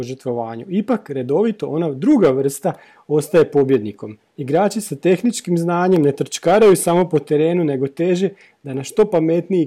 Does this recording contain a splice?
no; 0 cuts

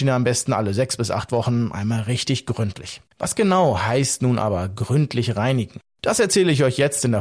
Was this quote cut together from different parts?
yes; 1 cut; at 3.1 s

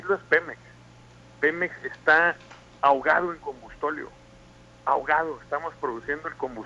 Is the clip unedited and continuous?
yes; 0 cuts

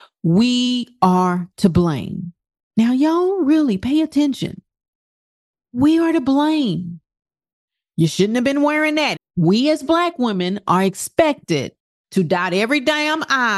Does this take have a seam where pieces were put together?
yes; 1 cut; at 9.2 s

